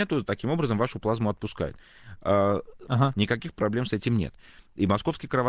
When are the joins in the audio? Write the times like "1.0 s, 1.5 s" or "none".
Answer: 2.9 s